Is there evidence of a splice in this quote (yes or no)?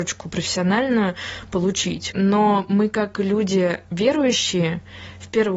no